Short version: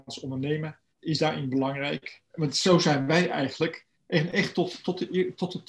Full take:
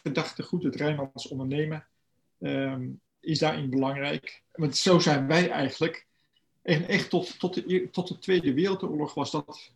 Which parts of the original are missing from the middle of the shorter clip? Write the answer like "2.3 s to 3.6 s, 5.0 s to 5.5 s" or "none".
2.0 s to 3.1 s, 6.1 s to 6.5 s